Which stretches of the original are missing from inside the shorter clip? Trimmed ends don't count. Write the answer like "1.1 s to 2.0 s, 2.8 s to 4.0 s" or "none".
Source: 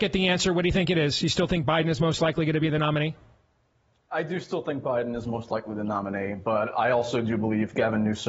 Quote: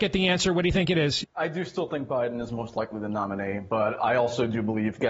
1.2 s to 4.0 s